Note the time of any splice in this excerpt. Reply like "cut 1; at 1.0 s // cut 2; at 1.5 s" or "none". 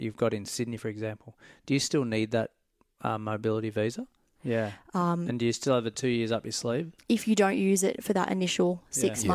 cut 1; at 4.4 s